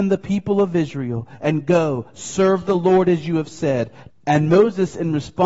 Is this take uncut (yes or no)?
no